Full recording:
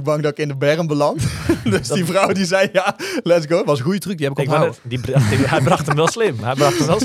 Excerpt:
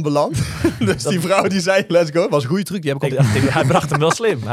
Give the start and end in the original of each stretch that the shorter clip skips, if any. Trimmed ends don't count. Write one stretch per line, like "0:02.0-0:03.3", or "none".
0:02.7-0:03.2
0:04.5-0:05.1

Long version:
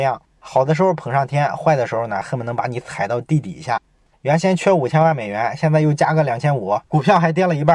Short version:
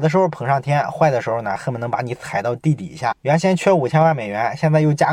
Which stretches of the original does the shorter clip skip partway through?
0:03.8-0:04.2

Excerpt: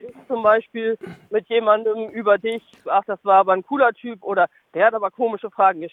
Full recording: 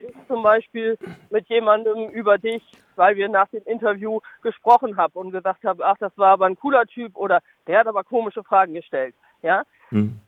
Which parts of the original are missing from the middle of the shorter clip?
0:02.8-0:05.8

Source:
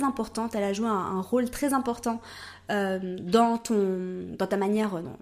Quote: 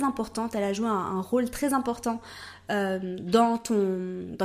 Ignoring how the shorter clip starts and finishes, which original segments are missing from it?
none

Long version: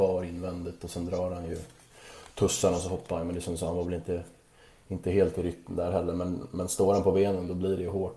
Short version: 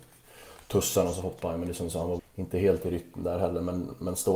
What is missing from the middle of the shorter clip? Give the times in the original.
0:03.9-0:04.7

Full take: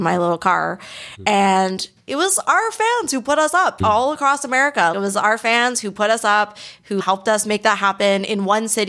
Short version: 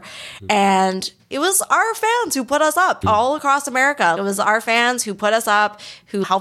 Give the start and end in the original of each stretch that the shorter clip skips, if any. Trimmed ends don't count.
none

